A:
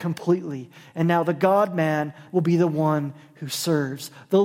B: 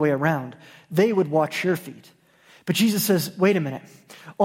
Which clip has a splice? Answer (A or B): A